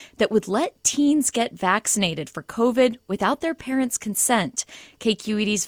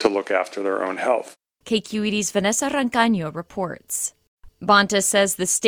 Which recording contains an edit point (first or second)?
second